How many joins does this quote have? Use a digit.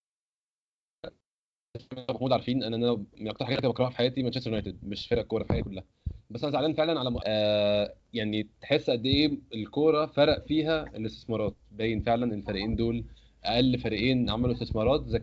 1